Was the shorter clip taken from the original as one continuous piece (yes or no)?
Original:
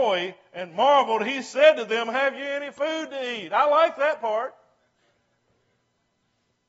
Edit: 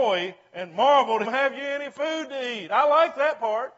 no